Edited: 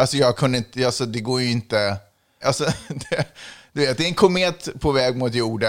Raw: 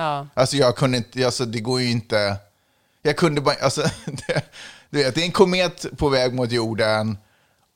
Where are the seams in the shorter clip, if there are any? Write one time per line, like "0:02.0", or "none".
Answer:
0:02.4